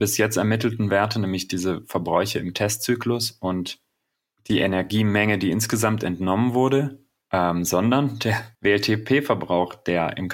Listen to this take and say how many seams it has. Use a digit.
2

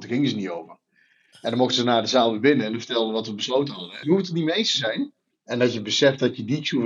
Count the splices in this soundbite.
2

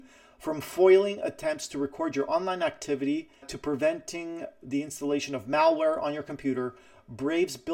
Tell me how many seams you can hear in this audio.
1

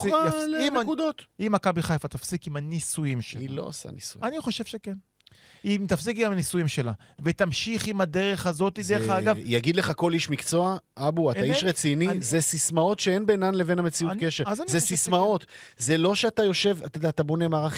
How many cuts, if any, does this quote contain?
0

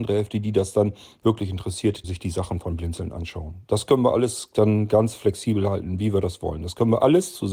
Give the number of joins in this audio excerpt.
1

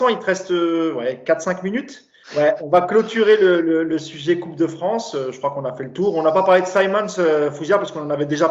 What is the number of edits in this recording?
1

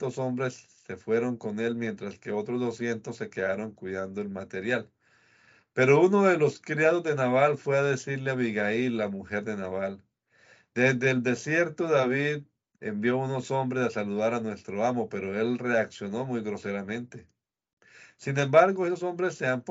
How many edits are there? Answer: 0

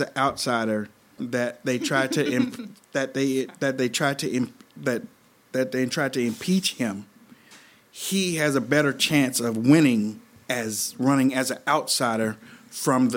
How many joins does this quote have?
1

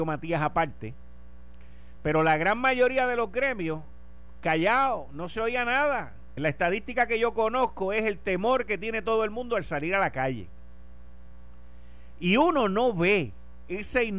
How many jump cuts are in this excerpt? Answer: 1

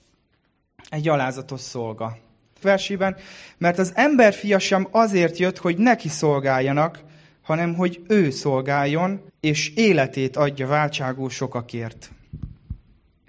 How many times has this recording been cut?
2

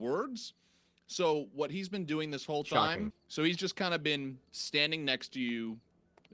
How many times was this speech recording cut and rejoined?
1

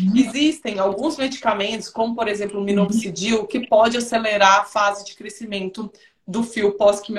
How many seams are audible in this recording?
0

